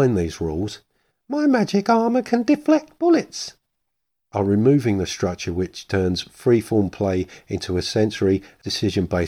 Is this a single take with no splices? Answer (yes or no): yes